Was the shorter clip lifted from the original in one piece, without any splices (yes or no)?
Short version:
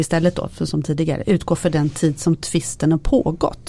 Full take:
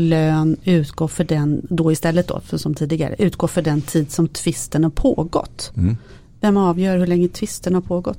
yes